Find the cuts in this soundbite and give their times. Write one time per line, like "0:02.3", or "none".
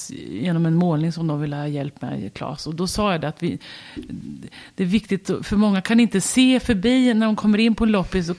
none